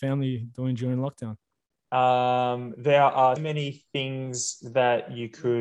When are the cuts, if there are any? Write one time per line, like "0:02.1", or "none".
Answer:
0:01.9
0:03.4